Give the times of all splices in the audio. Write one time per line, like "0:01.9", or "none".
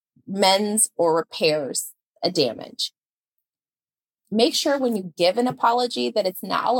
0:04.2